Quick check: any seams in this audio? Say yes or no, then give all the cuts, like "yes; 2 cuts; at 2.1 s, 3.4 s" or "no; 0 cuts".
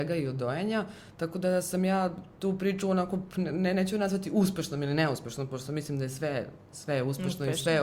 no; 0 cuts